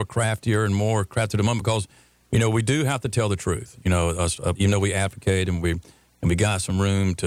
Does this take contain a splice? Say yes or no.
yes